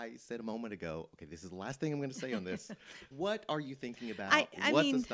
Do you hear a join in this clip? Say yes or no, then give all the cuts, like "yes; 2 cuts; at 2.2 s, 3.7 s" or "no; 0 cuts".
yes; 1 cut; at 3.1 s